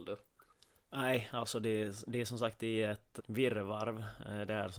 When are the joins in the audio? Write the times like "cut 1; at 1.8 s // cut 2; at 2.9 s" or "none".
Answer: cut 1; at 3.2 s